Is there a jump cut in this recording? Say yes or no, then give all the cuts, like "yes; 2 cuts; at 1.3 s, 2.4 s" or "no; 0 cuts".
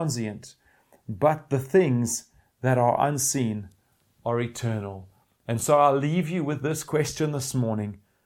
no; 0 cuts